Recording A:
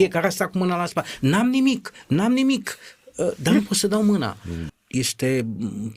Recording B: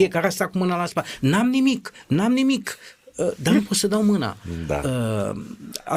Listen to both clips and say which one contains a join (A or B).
A